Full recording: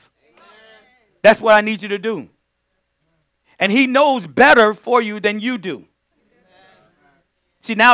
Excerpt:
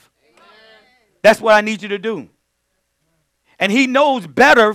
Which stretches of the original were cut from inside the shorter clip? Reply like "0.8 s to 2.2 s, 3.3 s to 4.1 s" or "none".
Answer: none